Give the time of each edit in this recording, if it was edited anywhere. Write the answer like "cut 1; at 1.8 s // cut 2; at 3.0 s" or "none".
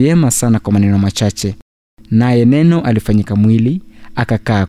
none